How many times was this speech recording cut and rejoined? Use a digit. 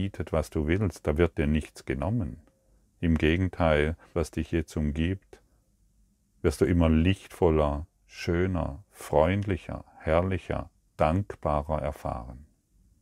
1